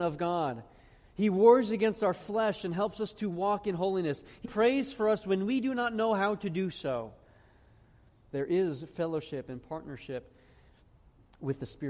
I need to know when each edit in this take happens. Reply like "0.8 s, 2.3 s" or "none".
4.4 s, 8.3 s